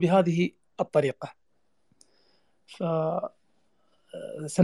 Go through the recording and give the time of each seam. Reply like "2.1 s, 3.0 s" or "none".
none